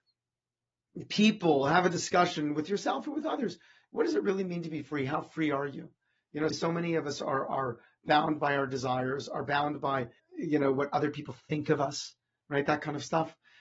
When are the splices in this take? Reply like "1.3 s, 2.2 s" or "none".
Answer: 6.5 s, 10.2 s